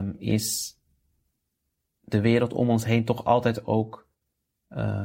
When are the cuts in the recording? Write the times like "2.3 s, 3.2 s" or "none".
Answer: none